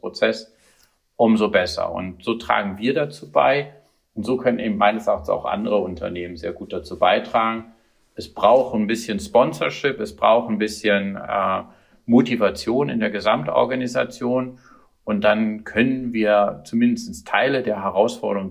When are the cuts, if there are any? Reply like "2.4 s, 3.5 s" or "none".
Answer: none